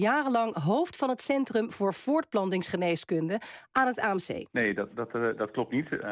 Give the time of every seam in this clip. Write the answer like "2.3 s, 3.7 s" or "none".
4.5 s